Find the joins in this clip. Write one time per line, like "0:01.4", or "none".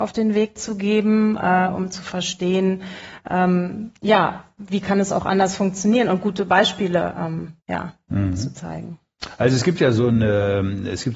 0:07.6